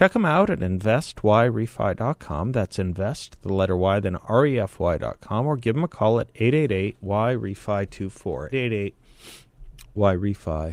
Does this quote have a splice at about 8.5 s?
yes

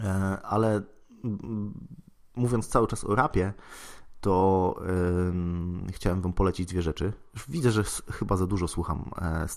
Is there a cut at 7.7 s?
no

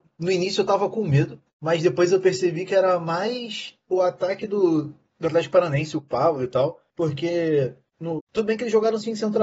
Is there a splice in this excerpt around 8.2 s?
yes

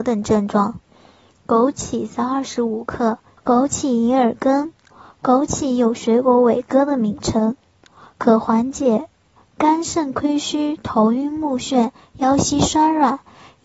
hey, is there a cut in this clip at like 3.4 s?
yes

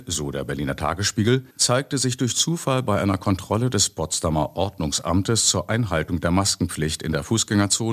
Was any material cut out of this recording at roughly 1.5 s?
yes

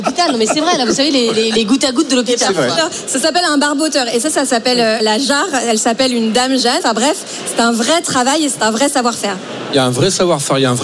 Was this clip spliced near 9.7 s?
no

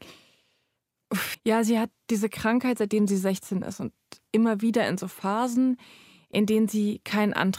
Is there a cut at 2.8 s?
no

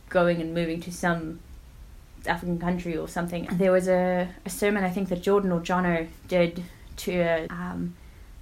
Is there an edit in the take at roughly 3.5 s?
yes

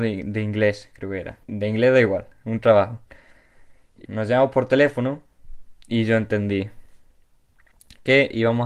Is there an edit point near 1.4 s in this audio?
yes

